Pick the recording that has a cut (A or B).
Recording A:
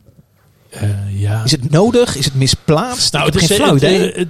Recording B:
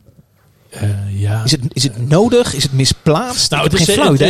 A